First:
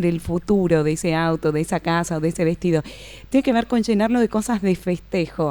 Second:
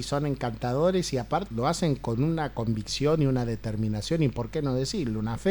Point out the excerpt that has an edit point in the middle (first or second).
second